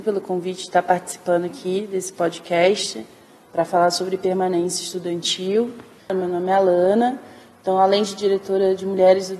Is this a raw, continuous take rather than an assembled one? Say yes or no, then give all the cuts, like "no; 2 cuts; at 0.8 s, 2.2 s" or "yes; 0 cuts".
no; 1 cut; at 6.0 s